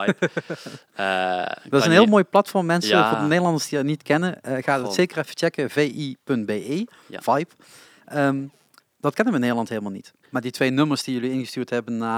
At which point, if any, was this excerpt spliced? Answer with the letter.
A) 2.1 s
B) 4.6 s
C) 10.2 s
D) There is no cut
C